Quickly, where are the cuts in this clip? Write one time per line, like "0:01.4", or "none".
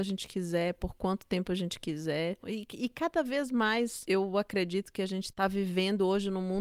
0:02.4

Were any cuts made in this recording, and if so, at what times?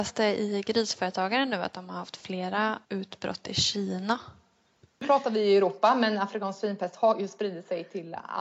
0:02.8

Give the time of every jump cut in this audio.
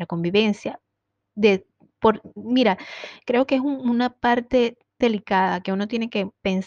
0:05.0

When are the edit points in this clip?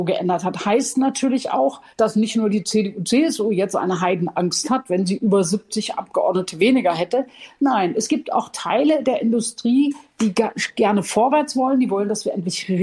0:01.9

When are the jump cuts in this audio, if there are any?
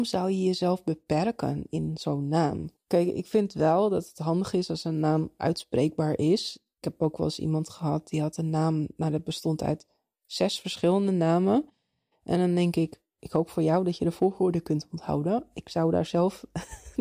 none

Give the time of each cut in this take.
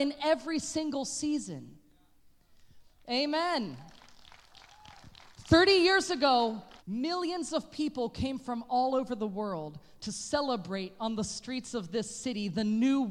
0:06.8

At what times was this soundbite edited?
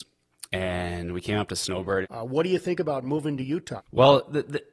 0:02.0
0:03.8

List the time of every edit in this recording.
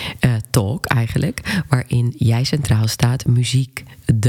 none

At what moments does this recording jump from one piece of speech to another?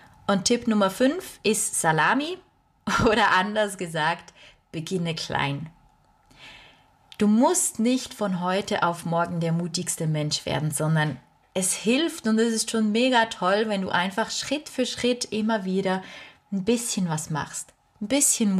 none

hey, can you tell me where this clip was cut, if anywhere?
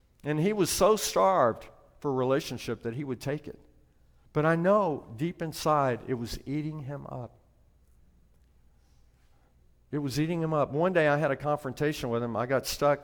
none

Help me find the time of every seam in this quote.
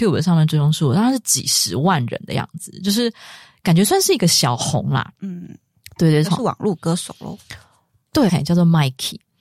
0:06.2
0:08.3

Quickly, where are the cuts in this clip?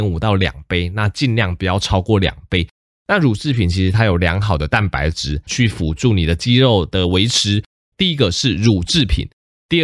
0:02.9
0:05.5
0:07.9

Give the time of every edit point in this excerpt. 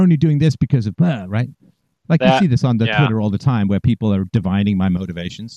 none

